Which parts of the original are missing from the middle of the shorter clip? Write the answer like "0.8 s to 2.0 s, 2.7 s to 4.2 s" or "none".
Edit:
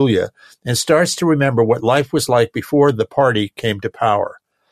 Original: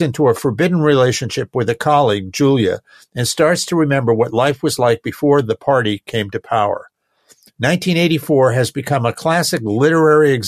none